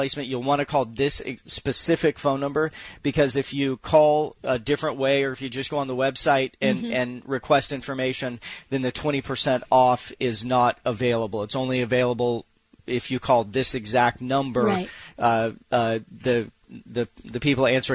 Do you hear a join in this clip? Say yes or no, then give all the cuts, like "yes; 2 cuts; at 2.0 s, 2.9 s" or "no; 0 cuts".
no; 0 cuts